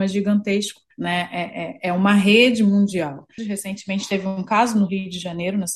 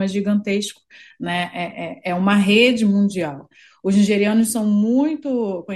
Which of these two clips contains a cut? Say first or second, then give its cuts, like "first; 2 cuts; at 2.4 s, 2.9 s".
first; 2 cuts; at 0.9 s, 3.4 s